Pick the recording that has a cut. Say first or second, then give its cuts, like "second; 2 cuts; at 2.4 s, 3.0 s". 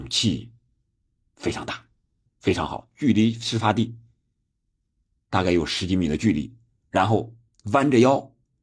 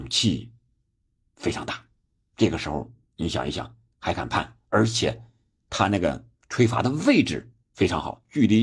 first; 1 cut; at 2.3 s